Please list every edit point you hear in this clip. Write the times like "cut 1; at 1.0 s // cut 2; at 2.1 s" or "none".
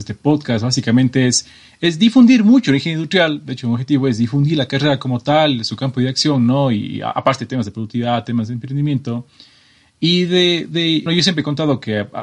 cut 1; at 11.1 s